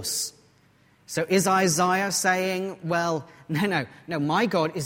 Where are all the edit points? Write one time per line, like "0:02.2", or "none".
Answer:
none